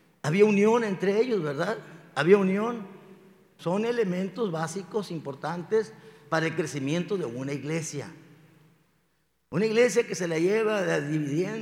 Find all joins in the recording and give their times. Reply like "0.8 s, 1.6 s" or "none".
3.6 s